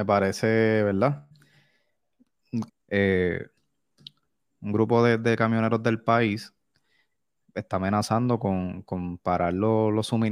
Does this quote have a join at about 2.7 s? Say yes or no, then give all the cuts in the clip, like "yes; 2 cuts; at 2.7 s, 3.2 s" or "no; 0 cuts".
yes; 1 cut; at 2.7 s